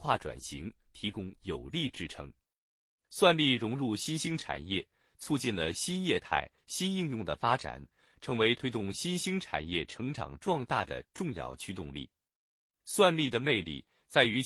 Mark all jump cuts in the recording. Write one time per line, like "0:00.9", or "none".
0:06.6